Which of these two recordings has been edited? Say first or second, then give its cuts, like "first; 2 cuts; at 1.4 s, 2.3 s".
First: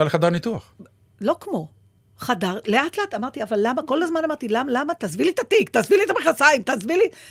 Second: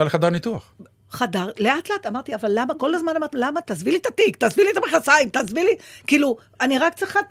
second; 2 cuts; at 0.9 s, 3.3 s